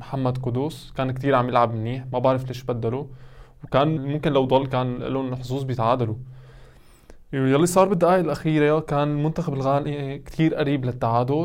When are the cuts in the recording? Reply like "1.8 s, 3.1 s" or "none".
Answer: 4.0 s